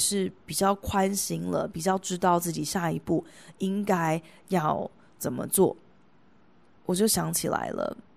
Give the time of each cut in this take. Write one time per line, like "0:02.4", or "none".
0:06.8